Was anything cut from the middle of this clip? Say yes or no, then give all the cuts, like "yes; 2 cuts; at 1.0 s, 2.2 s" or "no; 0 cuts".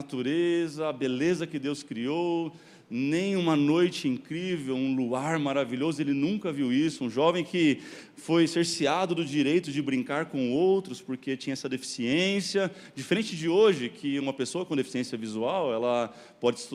no; 0 cuts